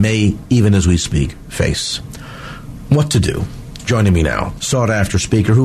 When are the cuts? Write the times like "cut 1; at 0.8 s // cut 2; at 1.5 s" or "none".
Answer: cut 1; at 4.6 s